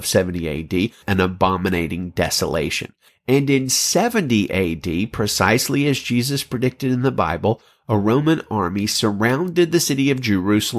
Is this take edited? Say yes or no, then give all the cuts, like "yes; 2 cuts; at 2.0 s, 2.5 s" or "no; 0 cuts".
yes; 2 cuts; at 1.0 s, 3.1 s